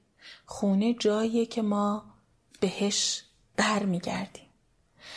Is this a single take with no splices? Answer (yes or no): yes